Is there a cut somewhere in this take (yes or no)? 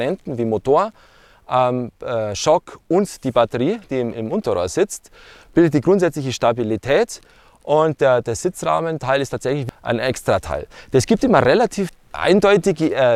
no